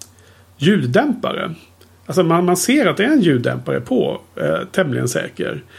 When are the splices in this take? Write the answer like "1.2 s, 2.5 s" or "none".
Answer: none